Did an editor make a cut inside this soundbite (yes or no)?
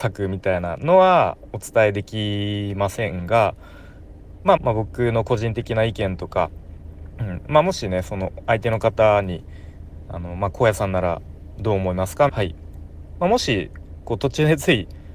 yes